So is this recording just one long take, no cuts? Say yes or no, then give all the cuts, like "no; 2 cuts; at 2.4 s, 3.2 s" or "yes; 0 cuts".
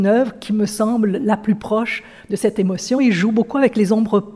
yes; 0 cuts